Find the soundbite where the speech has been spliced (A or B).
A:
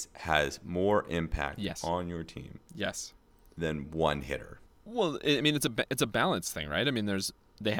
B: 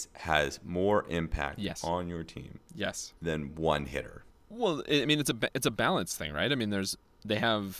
B